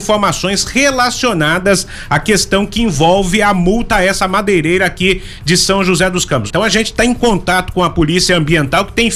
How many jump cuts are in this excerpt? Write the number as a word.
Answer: one